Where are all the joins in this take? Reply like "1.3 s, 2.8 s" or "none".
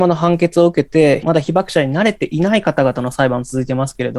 1.2 s

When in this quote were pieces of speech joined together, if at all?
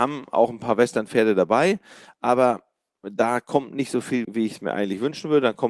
4.2 s

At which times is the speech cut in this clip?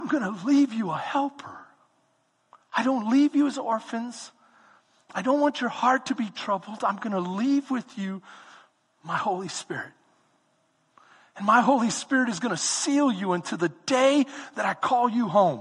none

